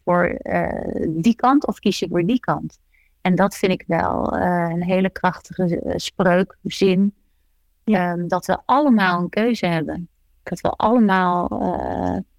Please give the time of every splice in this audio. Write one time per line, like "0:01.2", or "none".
none